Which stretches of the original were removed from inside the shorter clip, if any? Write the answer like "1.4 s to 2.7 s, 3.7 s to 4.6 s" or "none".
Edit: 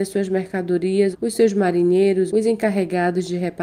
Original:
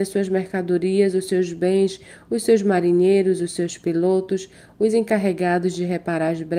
1.1 s to 2.2 s, 3.4 s to 4.8 s